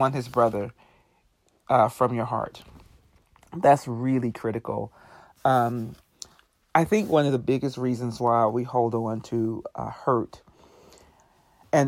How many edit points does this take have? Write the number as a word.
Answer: zero